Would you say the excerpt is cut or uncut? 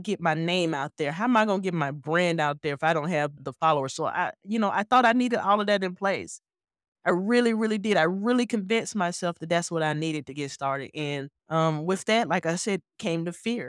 cut